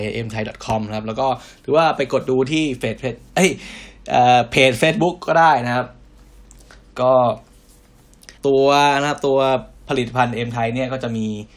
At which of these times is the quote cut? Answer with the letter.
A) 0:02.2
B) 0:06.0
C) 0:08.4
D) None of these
C